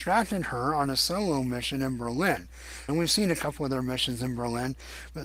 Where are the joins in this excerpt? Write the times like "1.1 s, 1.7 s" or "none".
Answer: 2.9 s